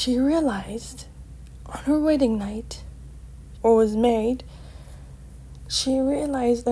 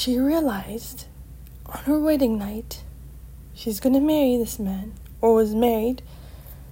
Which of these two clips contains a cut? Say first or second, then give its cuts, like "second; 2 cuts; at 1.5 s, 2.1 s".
first; 1 cut; at 3.6 s